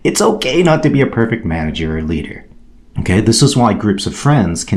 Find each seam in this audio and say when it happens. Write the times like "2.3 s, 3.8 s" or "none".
2.9 s